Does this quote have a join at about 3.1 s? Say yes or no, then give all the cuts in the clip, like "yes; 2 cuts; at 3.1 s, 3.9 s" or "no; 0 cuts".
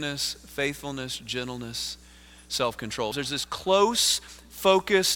yes; 1 cut; at 3.1 s